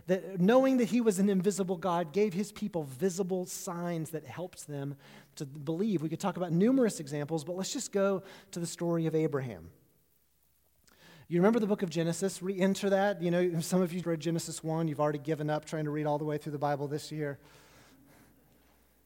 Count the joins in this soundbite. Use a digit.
1